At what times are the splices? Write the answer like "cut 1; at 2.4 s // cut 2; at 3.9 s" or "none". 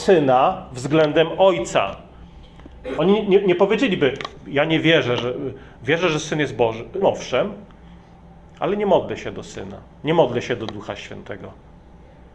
cut 1; at 3.0 s // cut 2; at 7.0 s